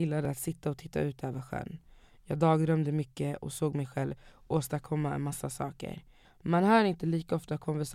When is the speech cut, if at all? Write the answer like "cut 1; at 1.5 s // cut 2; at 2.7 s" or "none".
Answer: cut 1; at 6.2 s

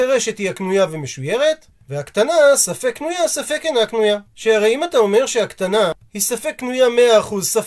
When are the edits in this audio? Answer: cut 1; at 4.3 s

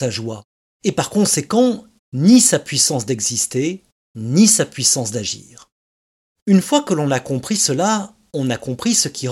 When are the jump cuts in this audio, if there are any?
cut 1; at 2.0 s

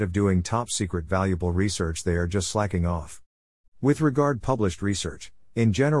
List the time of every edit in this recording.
cut 1; at 3.7 s

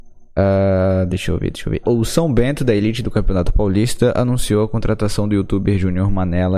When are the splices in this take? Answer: cut 1; at 1.8 s

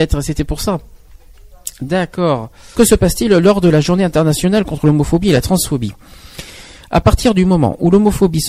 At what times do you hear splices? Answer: cut 1; at 2.7 s

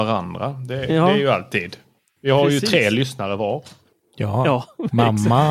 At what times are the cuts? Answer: none

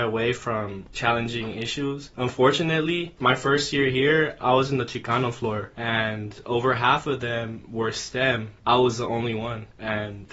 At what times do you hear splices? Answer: cut 1; at 8.6 s

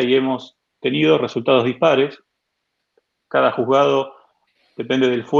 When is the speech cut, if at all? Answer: none

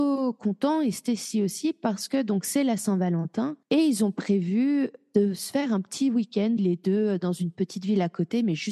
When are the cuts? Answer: cut 1; at 3.6 s // cut 2; at 6.6 s

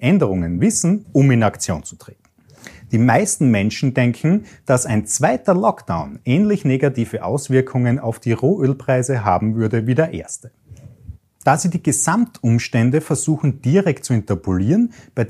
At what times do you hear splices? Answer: cut 1; at 1.0 s

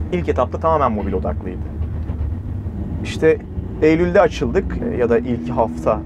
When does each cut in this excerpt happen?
cut 1; at 4.8 s

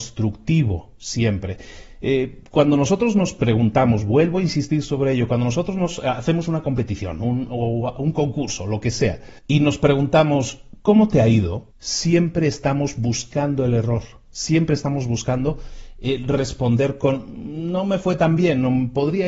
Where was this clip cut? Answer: cut 1; at 9.4 s // cut 2; at 11.7 s

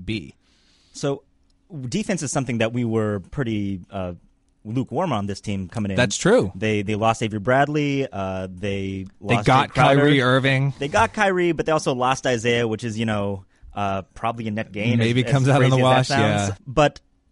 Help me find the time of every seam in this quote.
none

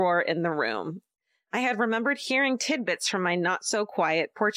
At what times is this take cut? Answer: none

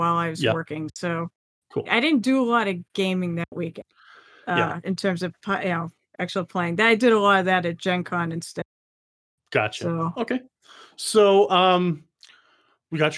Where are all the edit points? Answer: cut 1; at 1.9 s

